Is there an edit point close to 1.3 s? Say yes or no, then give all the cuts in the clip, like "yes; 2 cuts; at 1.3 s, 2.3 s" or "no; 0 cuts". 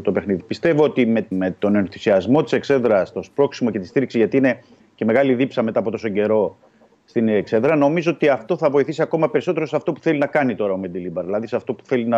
yes; 1 cut; at 1.3 s